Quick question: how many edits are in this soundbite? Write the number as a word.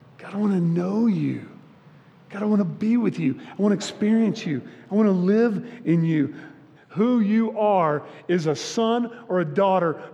one